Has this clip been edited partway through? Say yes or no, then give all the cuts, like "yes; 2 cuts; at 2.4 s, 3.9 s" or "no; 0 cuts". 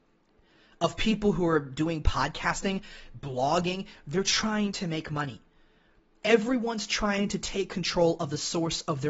no; 0 cuts